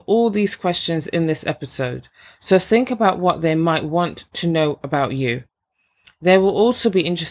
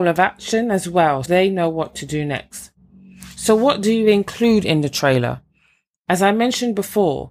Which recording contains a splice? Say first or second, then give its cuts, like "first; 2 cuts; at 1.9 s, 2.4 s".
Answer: second; 1 cut; at 1.2 s